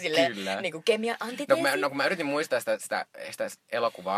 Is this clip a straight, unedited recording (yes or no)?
yes